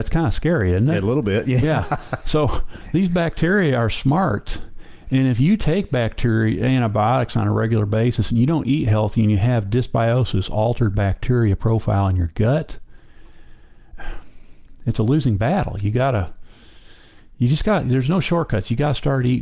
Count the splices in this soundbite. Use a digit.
0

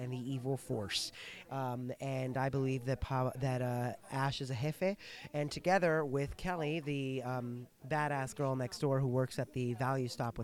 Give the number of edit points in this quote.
1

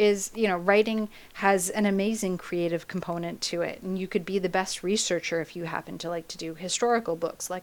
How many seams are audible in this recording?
0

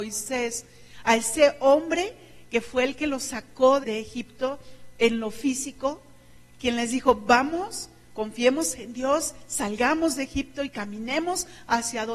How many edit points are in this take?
1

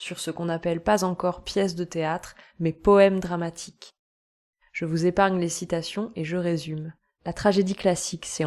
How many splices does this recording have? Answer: 0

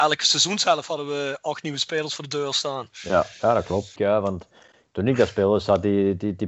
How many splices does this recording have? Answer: 1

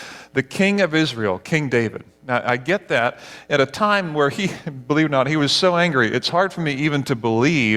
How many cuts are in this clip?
0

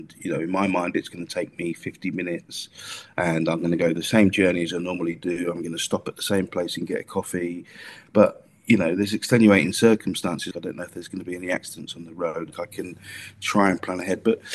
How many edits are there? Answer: 2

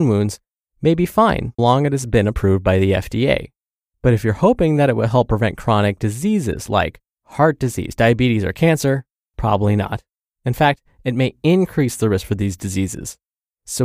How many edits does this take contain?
1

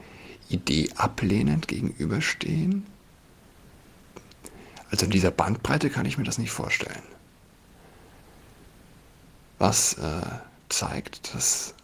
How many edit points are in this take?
0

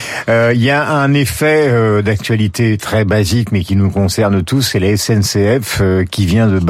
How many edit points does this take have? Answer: 0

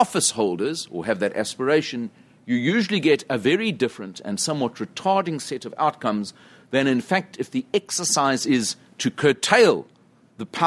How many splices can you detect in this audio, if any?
0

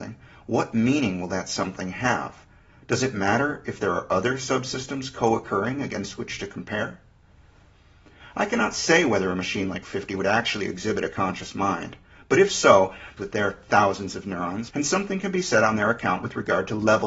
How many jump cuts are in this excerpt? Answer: 2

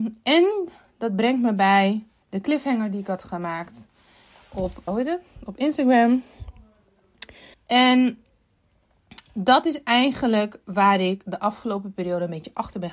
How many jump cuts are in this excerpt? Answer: 2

